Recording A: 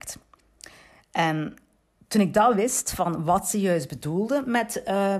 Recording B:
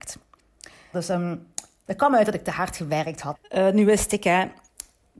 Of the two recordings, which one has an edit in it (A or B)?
B